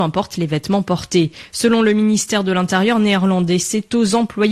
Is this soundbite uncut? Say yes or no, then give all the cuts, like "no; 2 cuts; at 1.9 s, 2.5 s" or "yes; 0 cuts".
yes; 0 cuts